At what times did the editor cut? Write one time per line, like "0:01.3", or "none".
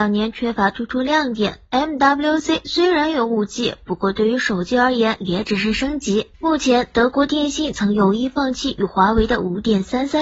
0:06.3

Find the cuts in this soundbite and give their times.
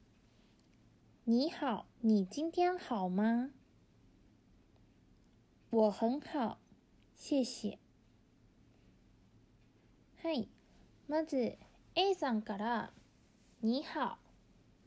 0:01.9

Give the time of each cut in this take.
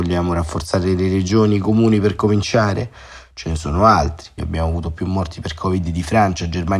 0:04.4

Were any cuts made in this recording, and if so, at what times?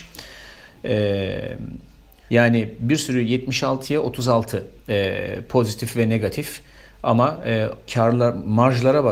0:02.3
0:07.9

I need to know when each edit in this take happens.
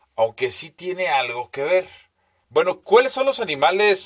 0:02.4

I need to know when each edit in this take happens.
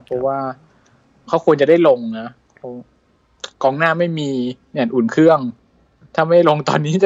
0:03.5
0:04.6

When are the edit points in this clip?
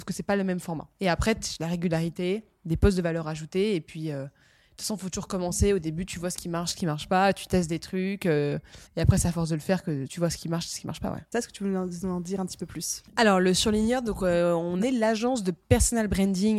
0:08.9
0:10.1
0:11.3

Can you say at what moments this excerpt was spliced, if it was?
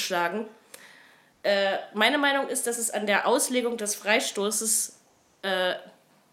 none

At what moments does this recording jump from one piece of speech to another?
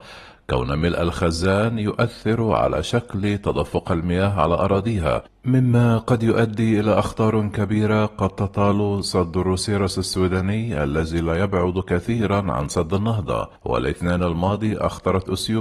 0:13.6

